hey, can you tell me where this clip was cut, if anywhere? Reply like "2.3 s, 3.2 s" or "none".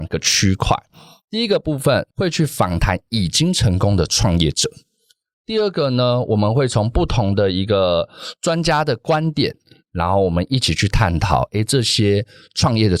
2.1 s